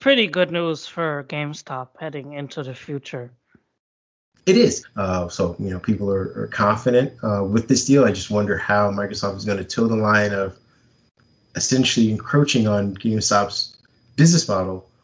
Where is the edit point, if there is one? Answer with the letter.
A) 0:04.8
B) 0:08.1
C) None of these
A